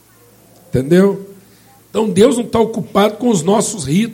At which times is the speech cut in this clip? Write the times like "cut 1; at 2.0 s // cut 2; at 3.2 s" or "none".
cut 1; at 1.8 s